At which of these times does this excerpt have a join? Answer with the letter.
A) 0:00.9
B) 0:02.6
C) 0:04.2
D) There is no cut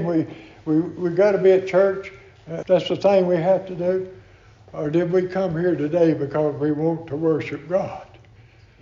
B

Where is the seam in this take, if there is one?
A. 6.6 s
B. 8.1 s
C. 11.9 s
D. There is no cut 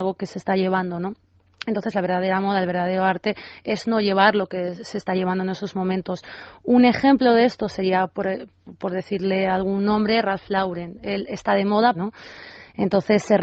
C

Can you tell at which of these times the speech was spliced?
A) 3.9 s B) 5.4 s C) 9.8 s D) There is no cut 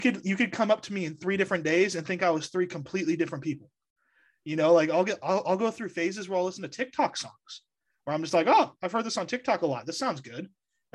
D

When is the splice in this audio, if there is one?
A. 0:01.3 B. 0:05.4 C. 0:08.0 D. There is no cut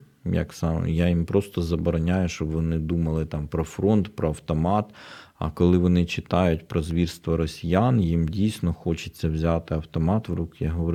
D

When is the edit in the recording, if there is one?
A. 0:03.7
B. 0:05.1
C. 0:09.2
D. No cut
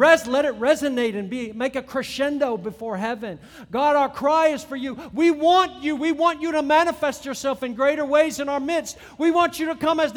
C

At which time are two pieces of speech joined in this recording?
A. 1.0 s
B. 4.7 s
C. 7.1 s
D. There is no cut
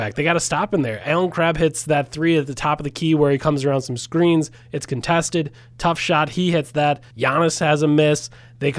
C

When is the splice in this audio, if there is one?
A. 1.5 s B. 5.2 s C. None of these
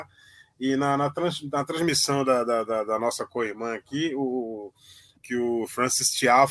B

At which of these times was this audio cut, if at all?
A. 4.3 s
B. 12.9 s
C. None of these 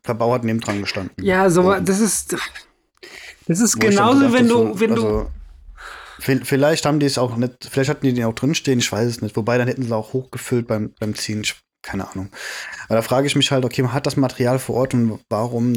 C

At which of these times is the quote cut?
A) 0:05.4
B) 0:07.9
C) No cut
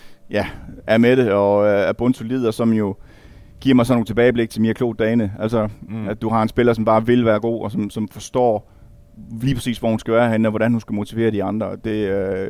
C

